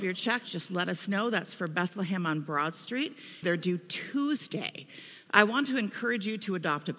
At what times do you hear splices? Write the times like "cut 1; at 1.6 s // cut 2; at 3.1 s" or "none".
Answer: cut 1; at 3.4 s // cut 2; at 5.3 s